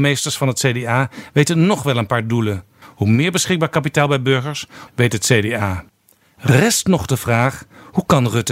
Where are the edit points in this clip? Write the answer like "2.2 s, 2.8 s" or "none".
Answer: 2.8 s, 4.9 s